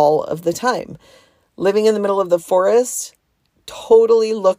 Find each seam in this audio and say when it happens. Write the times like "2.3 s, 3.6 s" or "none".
none

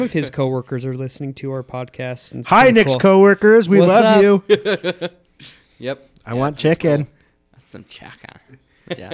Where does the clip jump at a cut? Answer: 2.4 s

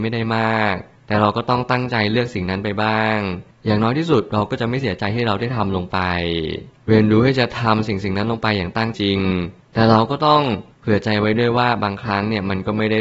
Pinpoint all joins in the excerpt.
8.9 s

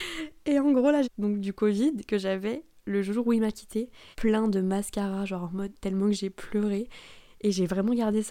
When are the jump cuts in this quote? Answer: 1.0 s, 4.1 s

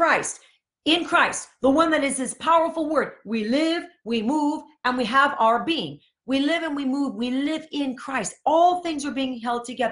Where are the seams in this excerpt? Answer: none

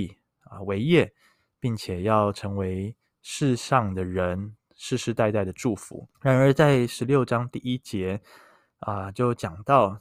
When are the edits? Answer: 6.1 s

